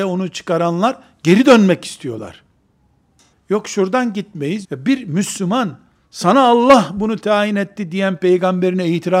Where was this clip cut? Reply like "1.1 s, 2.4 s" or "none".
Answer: 3.3 s, 4.6 s